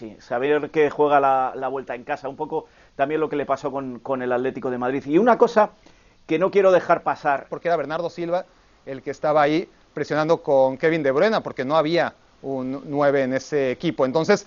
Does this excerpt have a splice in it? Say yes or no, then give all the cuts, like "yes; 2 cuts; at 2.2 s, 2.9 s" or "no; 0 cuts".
yes; 1 cut; at 7.5 s